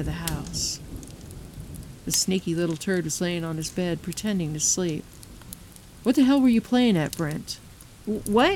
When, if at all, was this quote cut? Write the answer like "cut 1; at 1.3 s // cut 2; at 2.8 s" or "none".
cut 1; at 2.0 s